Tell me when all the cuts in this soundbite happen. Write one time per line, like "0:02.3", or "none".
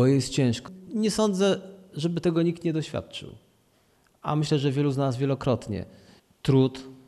none